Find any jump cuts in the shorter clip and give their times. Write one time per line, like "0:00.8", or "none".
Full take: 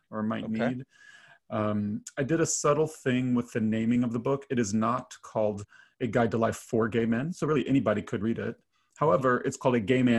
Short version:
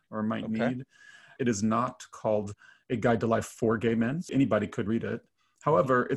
0:01.4
0:04.3